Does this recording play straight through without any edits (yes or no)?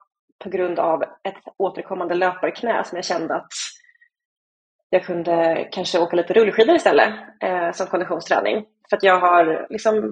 yes